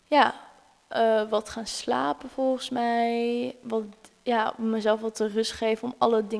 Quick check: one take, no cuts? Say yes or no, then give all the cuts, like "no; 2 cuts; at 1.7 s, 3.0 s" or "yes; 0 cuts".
yes; 0 cuts